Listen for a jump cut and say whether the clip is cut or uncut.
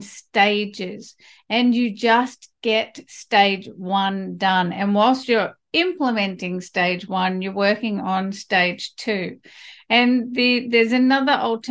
uncut